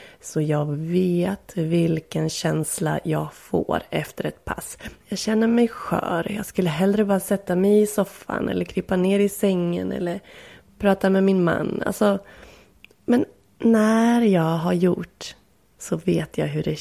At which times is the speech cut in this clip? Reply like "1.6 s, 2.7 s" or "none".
5.0 s